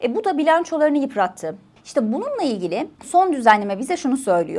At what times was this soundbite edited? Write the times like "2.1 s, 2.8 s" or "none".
1.8 s, 3.0 s